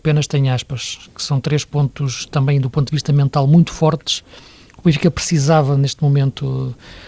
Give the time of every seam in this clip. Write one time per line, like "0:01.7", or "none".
none